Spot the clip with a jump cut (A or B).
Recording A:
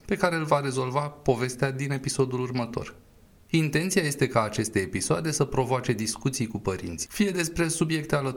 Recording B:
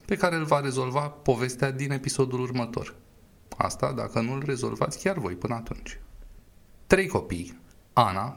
A